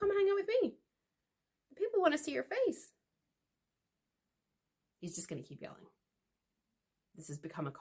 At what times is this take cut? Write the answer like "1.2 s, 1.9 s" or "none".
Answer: none